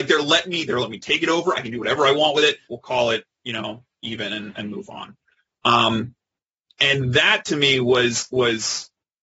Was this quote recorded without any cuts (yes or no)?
no